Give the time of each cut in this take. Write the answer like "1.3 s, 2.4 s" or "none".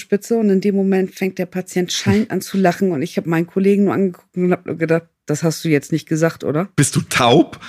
none